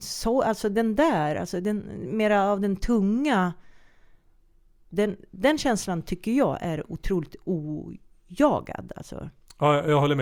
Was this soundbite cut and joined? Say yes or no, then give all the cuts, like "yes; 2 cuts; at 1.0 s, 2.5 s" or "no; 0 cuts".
no; 0 cuts